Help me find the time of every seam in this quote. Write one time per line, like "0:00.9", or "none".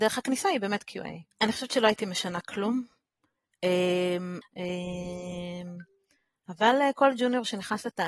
0:01.3
0:04.4